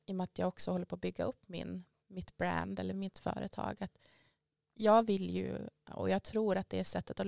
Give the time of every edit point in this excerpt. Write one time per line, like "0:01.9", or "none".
none